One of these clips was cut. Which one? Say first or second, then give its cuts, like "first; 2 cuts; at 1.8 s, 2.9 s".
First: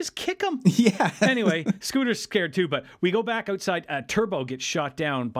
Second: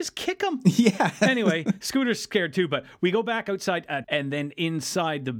second; 1 cut; at 4.0 s